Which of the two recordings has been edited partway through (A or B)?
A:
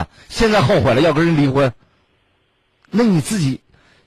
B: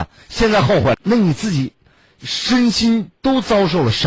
B